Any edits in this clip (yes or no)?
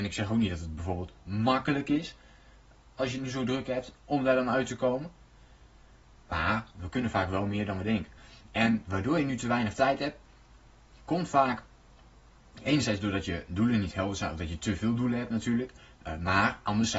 no